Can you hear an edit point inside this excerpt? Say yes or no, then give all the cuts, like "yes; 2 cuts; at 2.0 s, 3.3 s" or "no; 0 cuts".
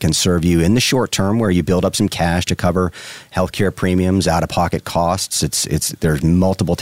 no; 0 cuts